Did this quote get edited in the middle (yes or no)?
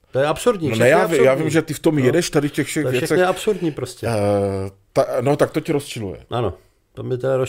no